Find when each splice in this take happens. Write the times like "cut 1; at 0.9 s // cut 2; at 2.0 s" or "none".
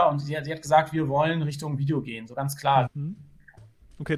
cut 1; at 2.9 s

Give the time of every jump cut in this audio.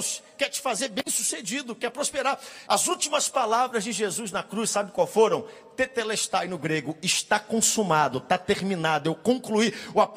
cut 1; at 2.7 s

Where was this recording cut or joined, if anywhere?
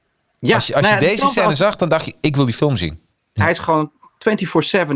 cut 1; at 3.4 s

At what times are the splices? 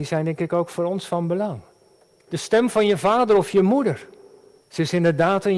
cut 1; at 2.3 s // cut 2; at 4.6 s

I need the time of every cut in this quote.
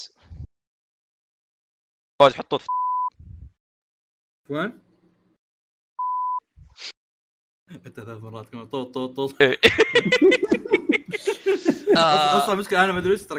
none

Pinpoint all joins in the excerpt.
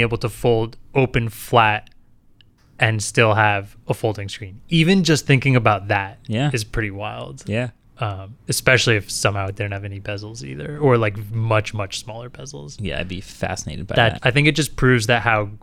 cut 1; at 14.2 s

